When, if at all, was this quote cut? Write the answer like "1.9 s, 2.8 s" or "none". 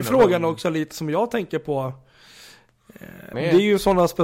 3.3 s